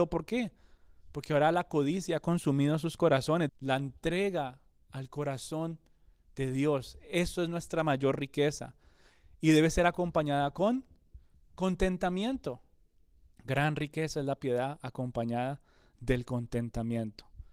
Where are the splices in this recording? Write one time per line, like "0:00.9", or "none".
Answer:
0:03.5
0:13.3